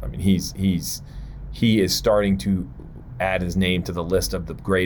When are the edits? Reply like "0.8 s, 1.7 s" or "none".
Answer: none